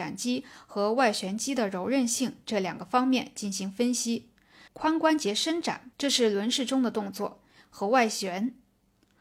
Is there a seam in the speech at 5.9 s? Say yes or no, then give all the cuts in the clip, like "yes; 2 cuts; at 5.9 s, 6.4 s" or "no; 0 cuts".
yes; 2 cuts; at 4.7 s, 5.9 s